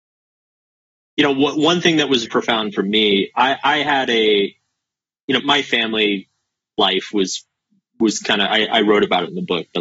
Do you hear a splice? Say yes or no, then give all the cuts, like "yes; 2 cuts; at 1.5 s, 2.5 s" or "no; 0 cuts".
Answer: yes; 2 cuts; at 2.3 s, 5.4 s